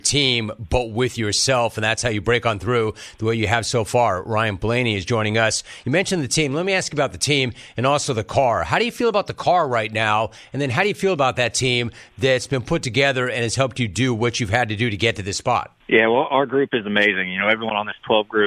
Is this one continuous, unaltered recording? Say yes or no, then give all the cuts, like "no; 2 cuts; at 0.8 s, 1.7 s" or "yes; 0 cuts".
yes; 0 cuts